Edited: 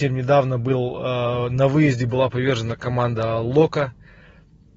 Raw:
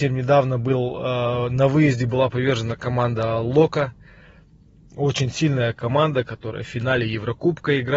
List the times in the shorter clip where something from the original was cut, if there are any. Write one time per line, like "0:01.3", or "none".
none